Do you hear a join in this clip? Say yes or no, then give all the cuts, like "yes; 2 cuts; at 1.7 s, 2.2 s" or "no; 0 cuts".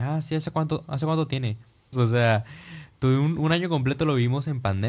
yes; 1 cut; at 1.9 s